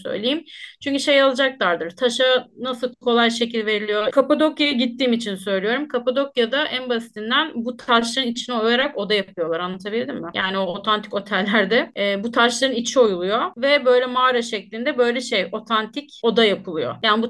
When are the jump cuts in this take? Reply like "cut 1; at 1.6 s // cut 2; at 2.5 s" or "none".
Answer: cut 1; at 4.1 s